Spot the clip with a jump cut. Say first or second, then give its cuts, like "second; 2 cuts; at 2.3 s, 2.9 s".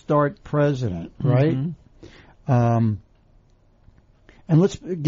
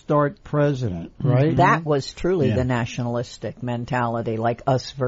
second; 1 cut; at 1.6 s